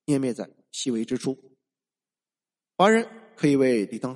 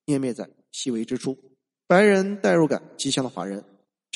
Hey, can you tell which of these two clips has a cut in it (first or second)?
second